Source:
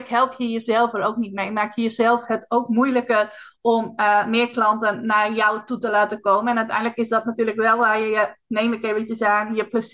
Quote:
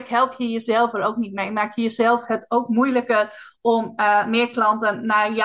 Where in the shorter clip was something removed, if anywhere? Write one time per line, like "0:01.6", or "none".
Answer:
none